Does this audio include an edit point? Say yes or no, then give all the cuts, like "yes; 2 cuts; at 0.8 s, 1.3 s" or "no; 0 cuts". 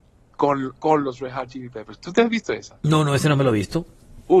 no; 0 cuts